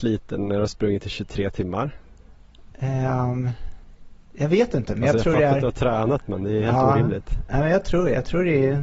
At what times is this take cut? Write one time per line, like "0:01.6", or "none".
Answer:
none